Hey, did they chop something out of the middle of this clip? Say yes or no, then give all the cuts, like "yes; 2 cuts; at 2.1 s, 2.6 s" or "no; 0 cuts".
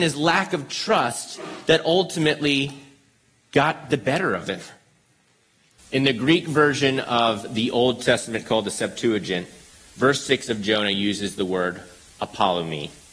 yes; 1 cut; at 5.8 s